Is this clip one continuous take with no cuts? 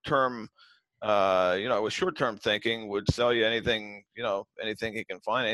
yes; 0 cuts

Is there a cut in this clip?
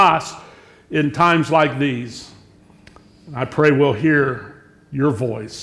no; 0 cuts

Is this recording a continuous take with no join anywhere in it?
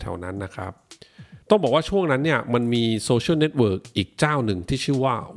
no; 1 cut; at 1.4 s

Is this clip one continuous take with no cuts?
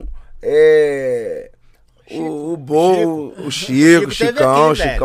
yes; 0 cuts

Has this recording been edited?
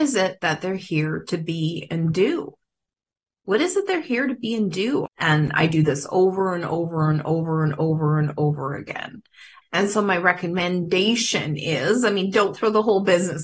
yes; 2 cuts; at 5.1 s, 9.6 s

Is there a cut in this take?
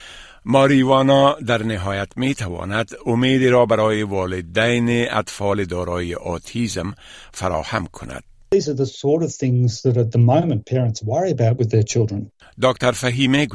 yes; 1 cut; at 12.4 s

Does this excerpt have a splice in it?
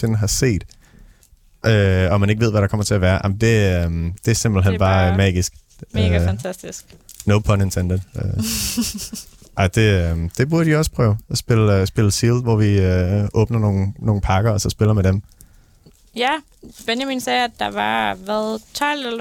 no; 0 cuts

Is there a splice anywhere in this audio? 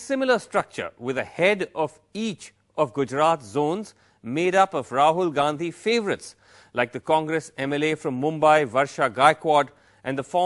no; 0 cuts

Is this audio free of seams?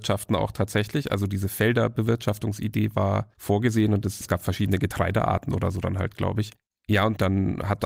no; 1 cut; at 4.2 s

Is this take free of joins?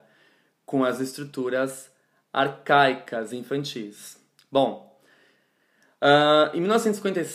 yes; 0 cuts

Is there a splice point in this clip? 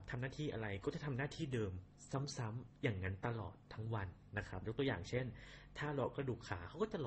no; 0 cuts

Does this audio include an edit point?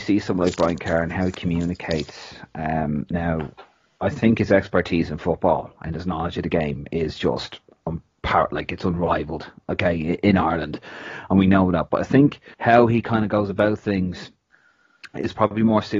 yes; 1 cut; at 12.5 s

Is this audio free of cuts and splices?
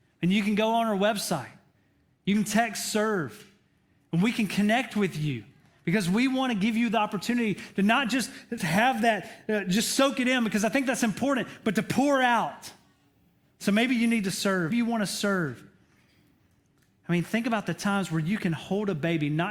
no; 2 cuts; at 8.6 s, 14.7 s

